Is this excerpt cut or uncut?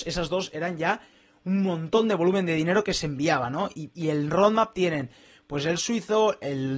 uncut